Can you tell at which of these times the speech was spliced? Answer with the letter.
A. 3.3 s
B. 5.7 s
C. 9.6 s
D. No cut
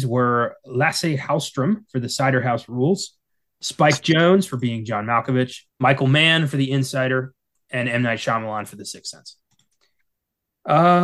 B